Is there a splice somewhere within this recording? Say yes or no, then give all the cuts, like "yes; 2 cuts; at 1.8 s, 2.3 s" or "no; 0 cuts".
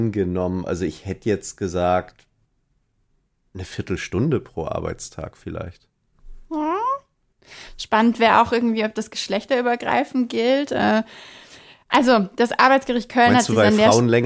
no; 0 cuts